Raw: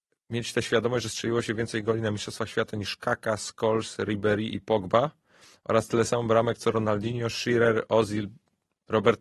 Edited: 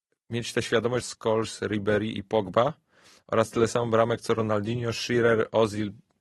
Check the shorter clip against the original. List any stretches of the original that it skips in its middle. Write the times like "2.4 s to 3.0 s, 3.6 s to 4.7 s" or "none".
1.0 s to 3.4 s